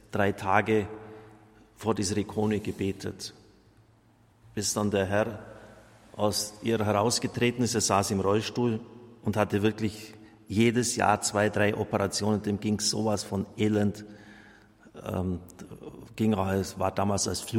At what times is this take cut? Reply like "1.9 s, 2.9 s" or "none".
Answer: none